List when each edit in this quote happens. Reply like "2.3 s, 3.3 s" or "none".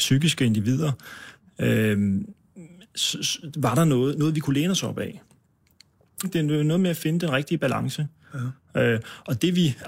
6.2 s